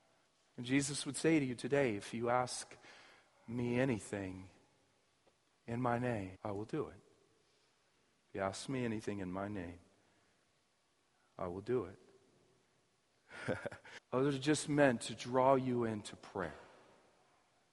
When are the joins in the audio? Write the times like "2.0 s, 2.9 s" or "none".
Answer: 6.3 s, 14.0 s